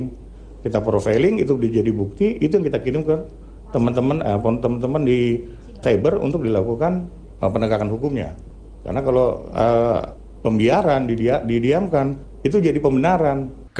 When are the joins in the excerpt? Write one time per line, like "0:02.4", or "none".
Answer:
0:05.8